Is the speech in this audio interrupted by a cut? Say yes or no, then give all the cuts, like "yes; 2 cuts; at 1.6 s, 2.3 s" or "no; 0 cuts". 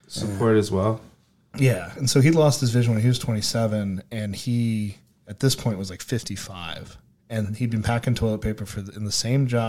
yes; 1 cut; at 2.0 s